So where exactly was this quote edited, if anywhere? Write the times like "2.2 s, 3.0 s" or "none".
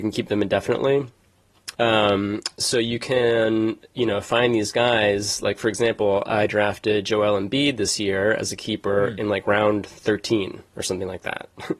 1.7 s